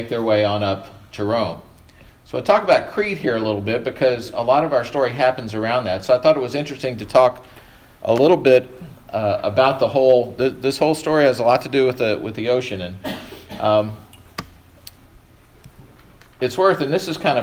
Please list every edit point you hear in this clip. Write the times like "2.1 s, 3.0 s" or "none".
none

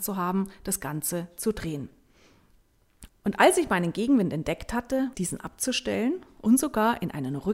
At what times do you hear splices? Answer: 3.1 s, 5.1 s

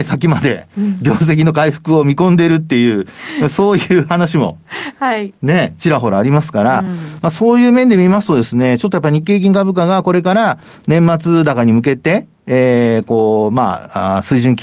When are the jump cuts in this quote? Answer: none

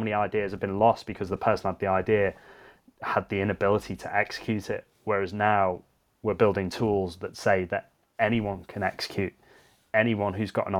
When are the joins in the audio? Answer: none

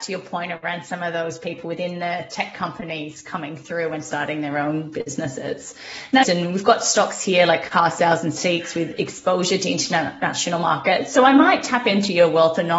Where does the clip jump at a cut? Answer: 6.2 s

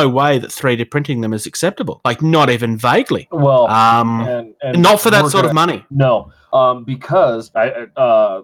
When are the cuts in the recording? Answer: none

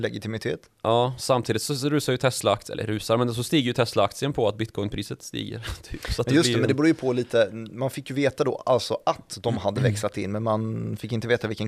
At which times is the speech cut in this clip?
none

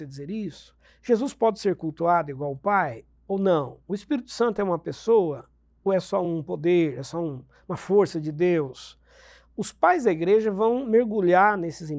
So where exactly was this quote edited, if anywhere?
none

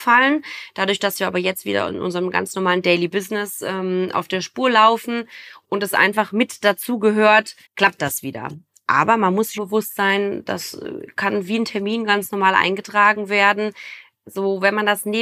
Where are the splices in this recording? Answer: 7.7 s, 9.6 s

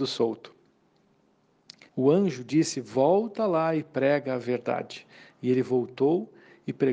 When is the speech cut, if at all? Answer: 1.9 s

